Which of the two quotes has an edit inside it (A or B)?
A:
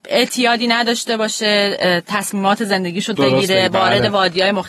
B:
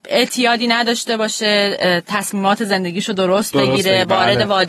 A